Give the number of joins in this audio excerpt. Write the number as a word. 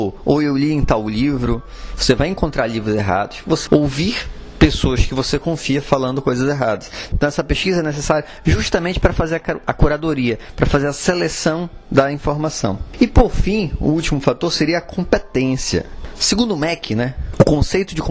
zero